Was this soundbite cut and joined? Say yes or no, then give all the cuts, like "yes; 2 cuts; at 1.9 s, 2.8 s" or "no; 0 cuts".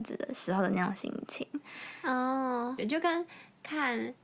yes; 1 cut; at 2.8 s